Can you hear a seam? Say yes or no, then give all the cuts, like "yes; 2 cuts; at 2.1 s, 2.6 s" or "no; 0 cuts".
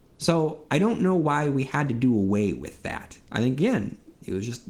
yes; 1 cut; at 3.3 s